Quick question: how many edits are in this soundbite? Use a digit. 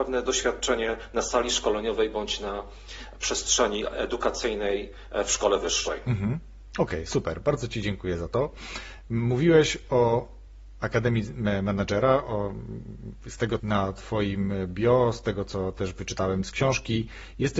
1